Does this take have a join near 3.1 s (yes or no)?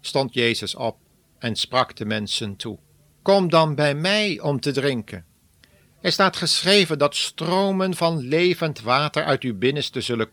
yes